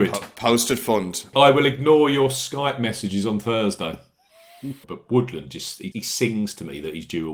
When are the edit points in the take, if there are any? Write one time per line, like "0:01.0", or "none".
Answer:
0:01.3
0:04.8
0:05.9